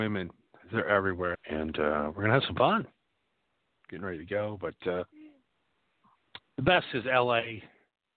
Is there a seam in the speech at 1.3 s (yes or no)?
yes